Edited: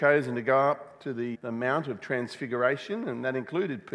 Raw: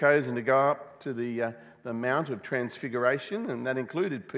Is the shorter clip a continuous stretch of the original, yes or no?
no